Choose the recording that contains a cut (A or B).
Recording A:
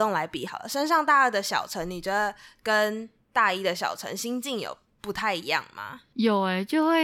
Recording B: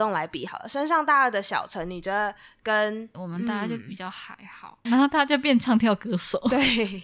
B